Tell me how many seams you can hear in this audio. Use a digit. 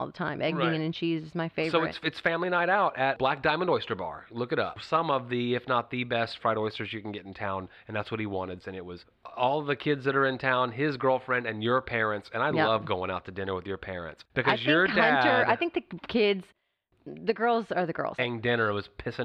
3